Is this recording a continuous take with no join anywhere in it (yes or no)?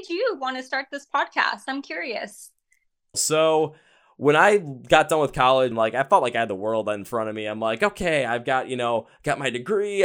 no